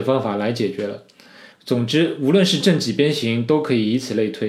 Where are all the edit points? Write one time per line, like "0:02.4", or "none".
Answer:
0:01.5